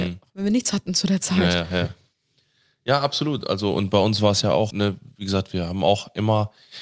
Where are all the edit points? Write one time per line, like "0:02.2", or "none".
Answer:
0:04.7